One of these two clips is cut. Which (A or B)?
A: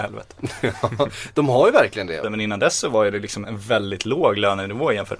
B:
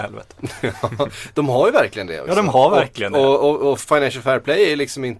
A